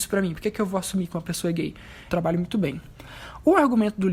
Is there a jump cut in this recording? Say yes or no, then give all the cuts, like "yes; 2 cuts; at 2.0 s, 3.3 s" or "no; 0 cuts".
yes; 1 cut; at 2.1 s